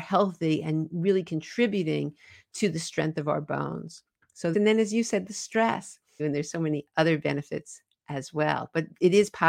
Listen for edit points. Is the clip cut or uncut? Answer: cut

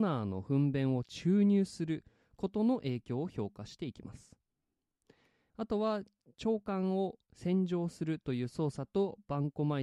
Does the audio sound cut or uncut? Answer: cut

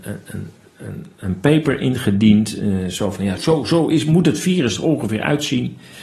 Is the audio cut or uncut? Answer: cut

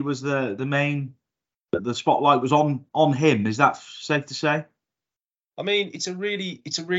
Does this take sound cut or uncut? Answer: uncut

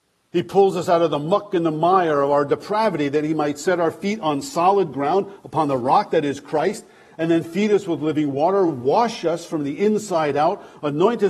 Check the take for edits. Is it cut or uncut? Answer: uncut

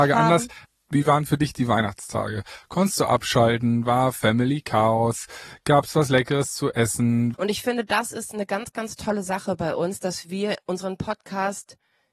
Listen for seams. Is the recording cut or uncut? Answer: cut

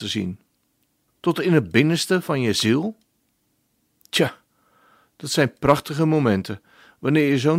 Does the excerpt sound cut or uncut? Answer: cut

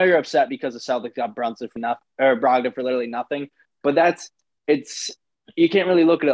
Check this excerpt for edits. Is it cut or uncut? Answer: cut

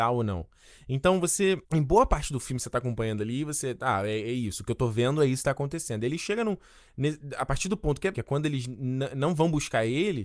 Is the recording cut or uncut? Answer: cut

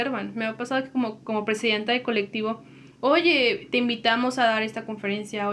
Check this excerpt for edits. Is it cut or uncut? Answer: cut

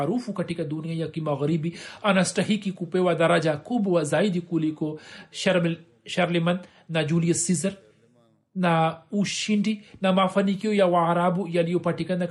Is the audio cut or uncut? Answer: uncut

